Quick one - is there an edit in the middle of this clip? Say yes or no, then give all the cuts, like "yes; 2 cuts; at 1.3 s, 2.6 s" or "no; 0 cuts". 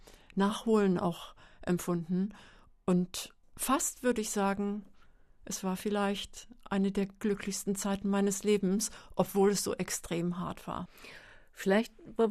no; 0 cuts